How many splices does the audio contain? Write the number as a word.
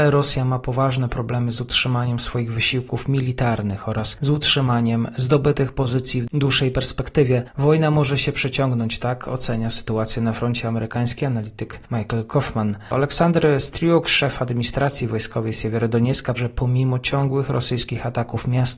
one